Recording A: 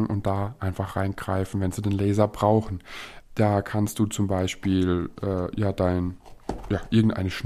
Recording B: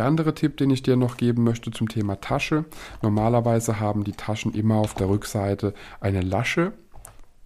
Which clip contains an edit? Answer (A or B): A